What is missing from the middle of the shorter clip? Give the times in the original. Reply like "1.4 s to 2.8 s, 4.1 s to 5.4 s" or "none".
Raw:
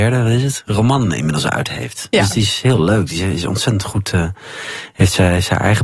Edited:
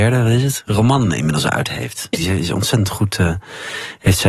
2.1 s to 3.1 s